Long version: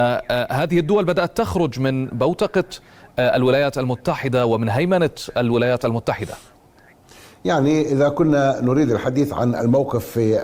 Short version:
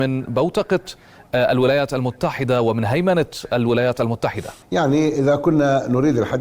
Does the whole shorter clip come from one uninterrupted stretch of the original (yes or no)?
no